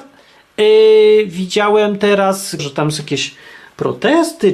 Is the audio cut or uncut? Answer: cut